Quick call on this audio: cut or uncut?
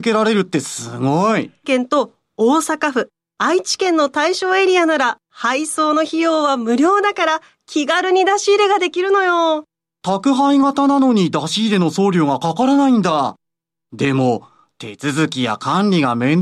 cut